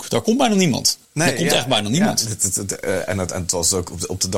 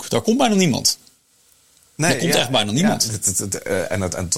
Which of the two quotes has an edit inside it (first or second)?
first